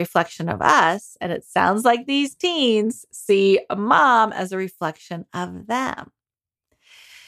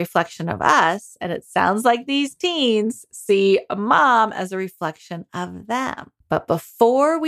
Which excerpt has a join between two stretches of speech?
second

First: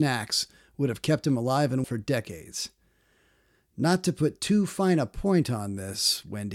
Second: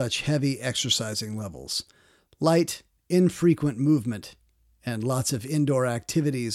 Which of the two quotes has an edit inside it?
first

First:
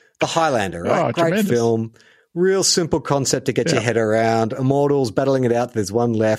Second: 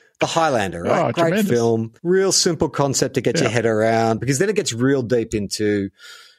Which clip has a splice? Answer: second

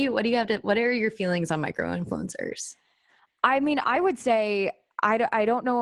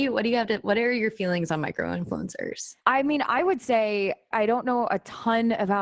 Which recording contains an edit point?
second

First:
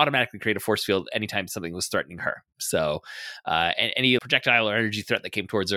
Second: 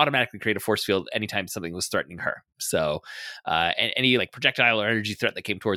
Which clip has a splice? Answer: first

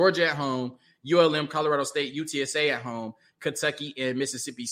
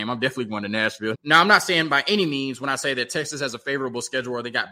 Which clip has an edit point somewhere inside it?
second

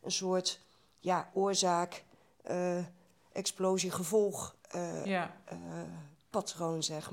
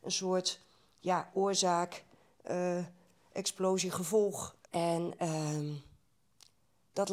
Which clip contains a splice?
second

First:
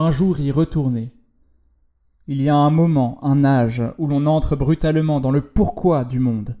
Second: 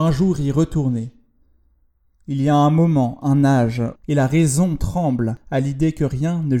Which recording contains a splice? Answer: second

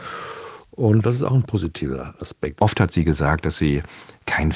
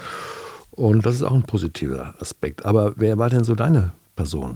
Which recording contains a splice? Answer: first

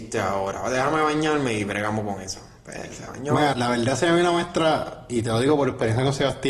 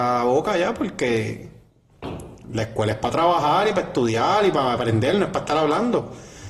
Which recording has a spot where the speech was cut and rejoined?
first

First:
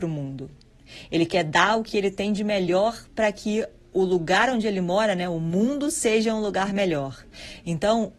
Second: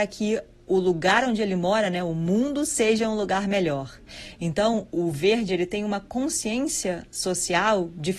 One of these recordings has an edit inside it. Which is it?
second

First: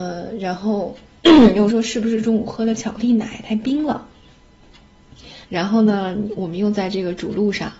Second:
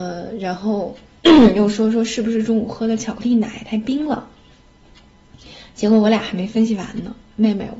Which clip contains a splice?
first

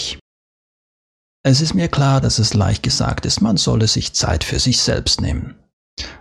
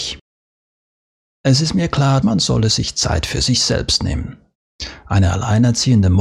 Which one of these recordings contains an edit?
second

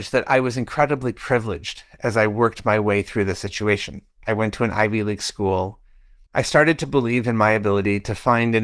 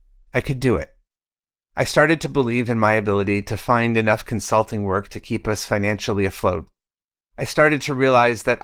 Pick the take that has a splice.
first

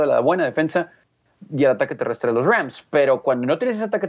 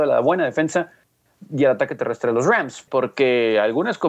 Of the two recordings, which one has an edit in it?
second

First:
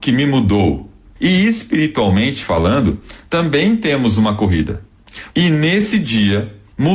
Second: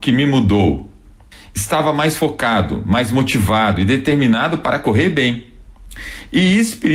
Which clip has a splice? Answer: first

